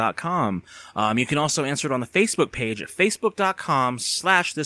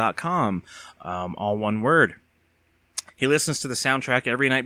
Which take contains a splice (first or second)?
second